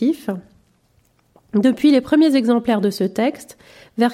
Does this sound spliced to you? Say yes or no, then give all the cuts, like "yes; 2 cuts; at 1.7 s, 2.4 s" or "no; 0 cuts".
no; 0 cuts